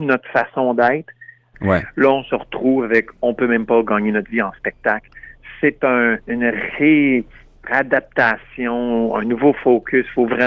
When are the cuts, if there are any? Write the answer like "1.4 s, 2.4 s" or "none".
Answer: 1.5 s, 6.2 s